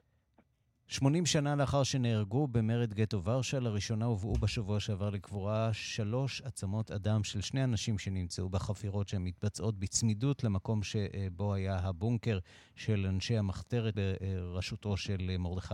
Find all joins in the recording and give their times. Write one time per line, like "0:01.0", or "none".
0:13.9